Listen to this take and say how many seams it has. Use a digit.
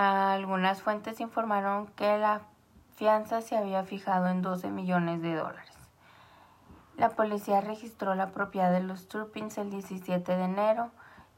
0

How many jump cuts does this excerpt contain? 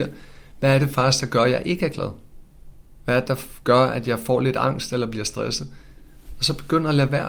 0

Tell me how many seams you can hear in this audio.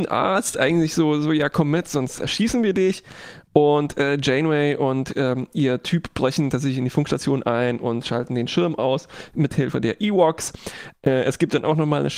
0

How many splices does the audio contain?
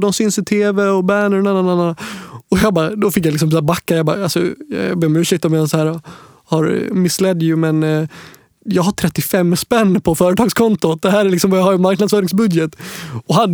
0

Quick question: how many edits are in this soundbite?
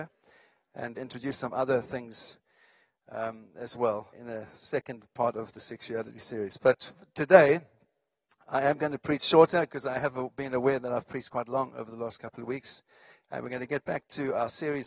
2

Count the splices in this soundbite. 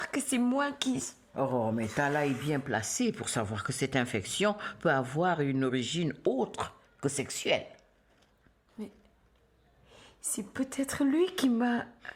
1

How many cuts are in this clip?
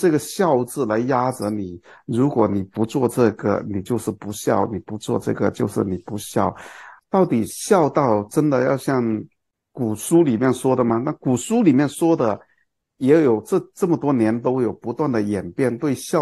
1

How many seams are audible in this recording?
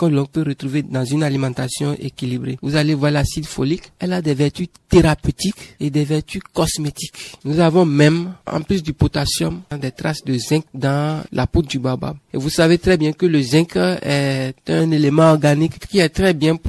3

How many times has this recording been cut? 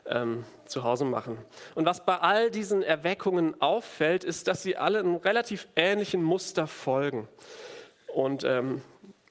0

